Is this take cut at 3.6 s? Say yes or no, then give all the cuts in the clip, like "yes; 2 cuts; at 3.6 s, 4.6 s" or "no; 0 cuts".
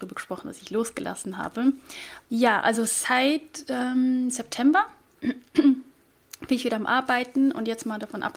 no; 1 cut; at 2.2 s